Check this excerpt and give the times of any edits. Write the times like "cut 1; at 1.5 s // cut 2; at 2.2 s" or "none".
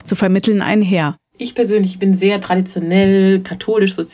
none